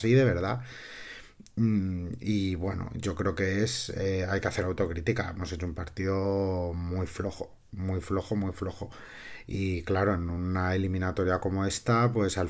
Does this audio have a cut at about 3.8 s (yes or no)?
no